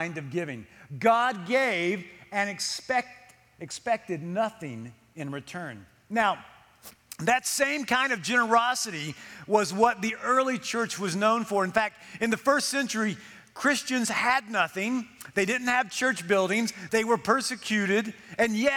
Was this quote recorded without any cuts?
no; 1 cut; at 16.9 s

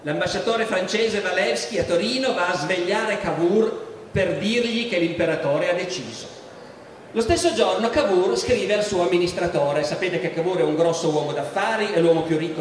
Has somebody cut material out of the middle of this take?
yes; 1 cut; at 7.1 s

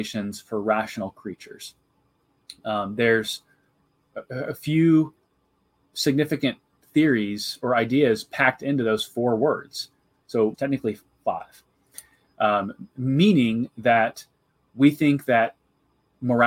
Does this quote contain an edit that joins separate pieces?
yes; 1 cut; at 10.5 s

